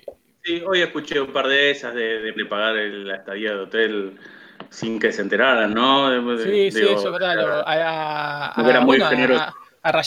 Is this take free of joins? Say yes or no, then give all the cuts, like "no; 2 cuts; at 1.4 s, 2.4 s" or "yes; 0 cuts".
no; 1 cut; at 2.4 s